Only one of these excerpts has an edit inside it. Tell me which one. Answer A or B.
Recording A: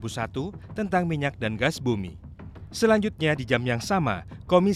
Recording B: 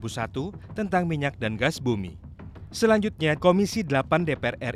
B